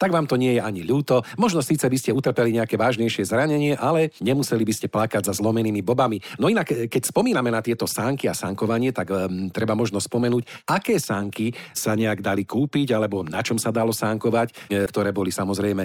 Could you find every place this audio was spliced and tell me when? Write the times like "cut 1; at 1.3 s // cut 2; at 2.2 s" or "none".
cut 1; at 14.9 s